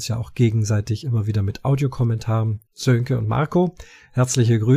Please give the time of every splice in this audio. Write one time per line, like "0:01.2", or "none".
0:02.6